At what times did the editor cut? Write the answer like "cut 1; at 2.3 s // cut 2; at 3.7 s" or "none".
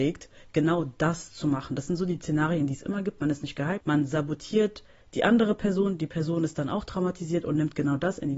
cut 1; at 3.8 s

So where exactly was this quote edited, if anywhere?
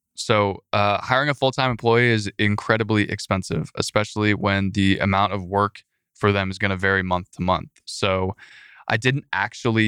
none

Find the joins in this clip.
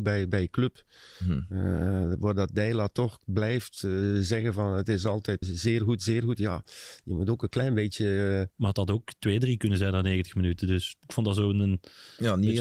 cut 1; at 5.4 s // cut 2; at 8.5 s

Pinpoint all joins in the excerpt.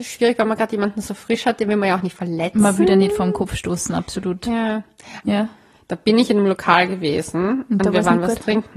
cut 1; at 5.2 s

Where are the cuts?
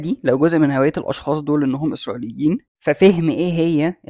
cut 1; at 2.7 s

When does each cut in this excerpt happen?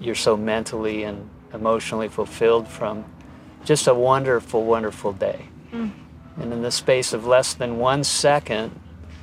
none

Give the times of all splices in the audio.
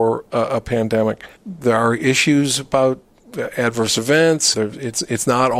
cut 1; at 1.4 s // cut 2; at 4.5 s

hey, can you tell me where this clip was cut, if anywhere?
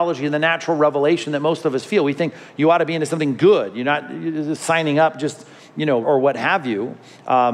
cut 1; at 6.0 s

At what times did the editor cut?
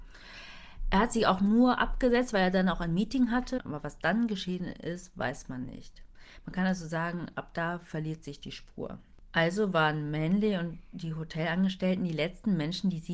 cut 1; at 3.6 s

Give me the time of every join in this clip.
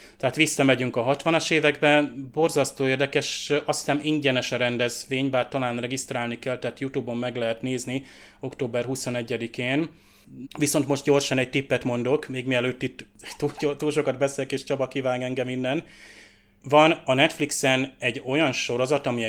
cut 1; at 10.4 s

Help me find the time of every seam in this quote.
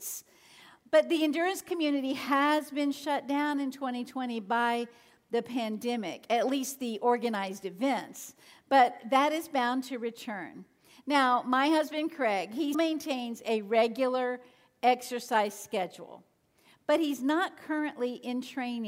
cut 1; at 12.7 s

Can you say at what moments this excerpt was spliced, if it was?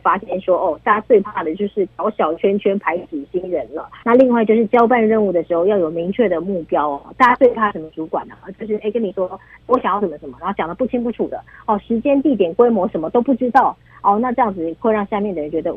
cut 1; at 4.0 s

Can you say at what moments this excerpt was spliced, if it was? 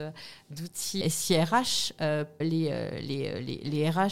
cut 1; at 1.0 s // cut 2; at 2.4 s

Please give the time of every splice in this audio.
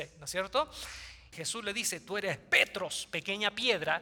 cut 1; at 1.3 s

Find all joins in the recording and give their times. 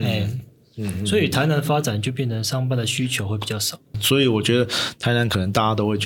cut 1; at 3.9 s

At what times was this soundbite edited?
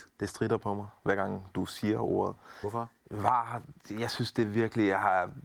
cut 1; at 3.0 s

